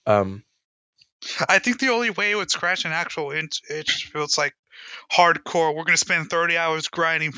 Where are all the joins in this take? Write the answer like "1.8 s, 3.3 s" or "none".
none